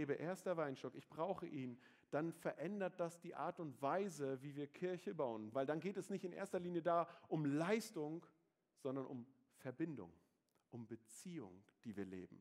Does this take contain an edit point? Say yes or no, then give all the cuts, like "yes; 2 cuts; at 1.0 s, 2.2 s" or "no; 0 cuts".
yes; 1 cut; at 5.5 s